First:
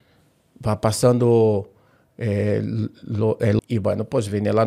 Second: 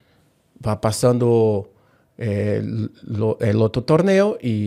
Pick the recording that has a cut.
first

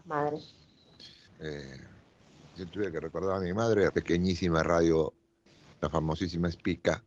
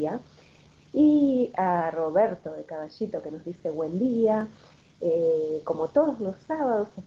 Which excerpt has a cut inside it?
first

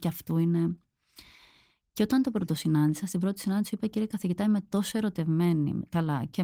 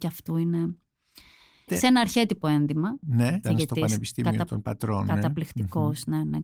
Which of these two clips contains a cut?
second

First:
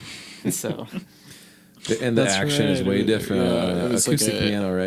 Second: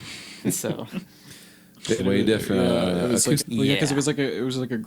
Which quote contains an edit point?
second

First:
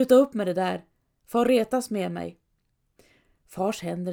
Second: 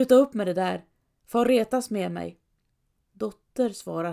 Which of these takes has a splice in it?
second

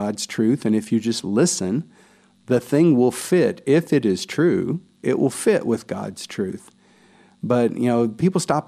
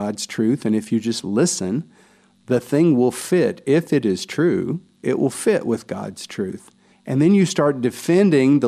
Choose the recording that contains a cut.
second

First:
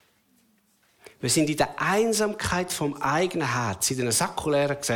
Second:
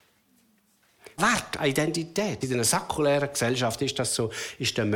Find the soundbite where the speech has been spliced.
second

